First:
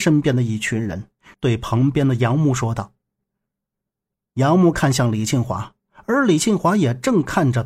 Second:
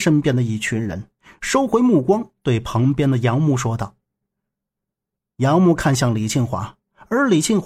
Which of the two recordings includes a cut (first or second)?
first